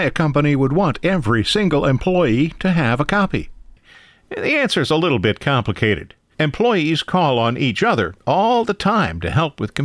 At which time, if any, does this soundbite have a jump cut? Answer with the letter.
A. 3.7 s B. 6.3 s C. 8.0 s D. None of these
B